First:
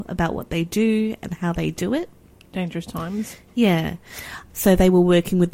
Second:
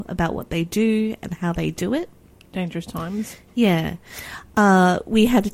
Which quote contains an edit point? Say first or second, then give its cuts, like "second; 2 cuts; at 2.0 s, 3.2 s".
first; 1 cut; at 4.5 s